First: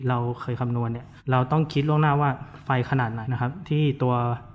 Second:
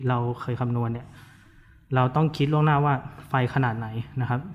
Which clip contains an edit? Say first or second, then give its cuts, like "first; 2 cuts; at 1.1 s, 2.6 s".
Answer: first; 2 cuts; at 1.2 s, 3.2 s